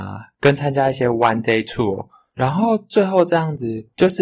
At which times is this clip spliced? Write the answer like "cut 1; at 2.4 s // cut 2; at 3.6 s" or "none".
none